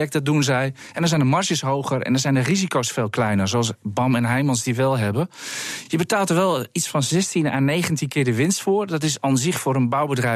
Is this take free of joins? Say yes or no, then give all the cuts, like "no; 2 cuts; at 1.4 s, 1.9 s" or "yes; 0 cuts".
yes; 0 cuts